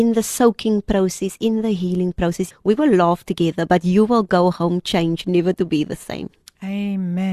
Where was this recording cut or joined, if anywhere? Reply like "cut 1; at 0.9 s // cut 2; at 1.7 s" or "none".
cut 1; at 2.5 s